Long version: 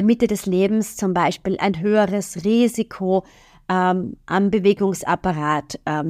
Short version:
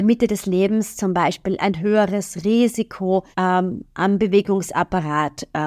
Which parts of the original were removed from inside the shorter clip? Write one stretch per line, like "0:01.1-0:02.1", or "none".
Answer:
0:03.3-0:03.6